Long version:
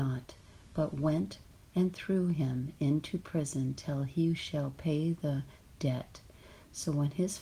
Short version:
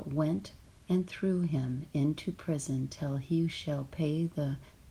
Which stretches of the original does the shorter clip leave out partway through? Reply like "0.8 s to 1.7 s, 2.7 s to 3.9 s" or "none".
none